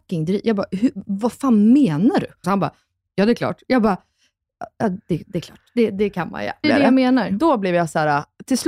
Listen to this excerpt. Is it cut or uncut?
cut